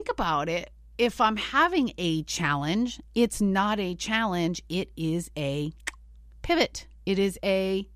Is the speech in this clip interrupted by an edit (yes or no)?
no